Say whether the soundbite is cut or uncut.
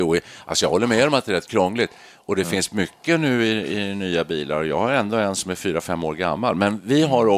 uncut